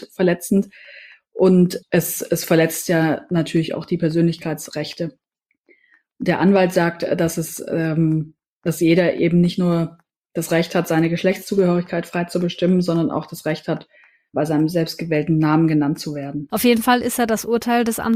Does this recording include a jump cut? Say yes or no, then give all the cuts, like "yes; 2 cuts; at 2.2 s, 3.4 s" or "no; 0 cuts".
yes; 1 cut; at 16.5 s